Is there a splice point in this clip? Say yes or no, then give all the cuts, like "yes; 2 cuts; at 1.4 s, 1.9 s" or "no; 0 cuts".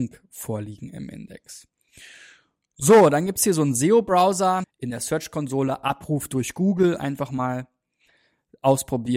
yes; 1 cut; at 4.6 s